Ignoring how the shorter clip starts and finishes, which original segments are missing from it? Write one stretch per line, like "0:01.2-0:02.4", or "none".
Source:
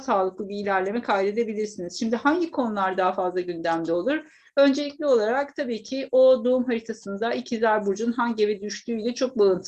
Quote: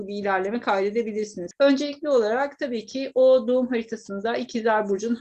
0:01.9-0:04.5